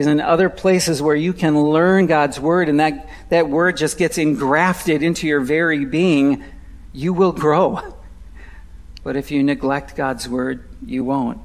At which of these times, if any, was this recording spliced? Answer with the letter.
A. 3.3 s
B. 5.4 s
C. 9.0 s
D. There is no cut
C